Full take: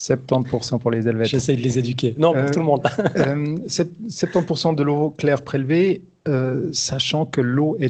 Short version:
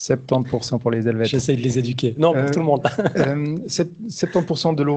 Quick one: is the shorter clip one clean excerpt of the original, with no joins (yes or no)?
yes